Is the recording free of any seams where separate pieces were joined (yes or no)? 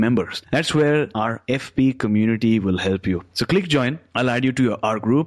no